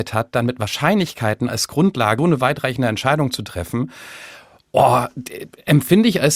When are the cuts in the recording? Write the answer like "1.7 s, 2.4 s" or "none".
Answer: 2.2 s